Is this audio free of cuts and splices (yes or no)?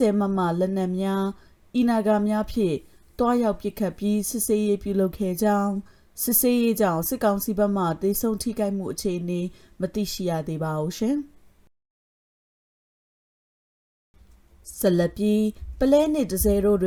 yes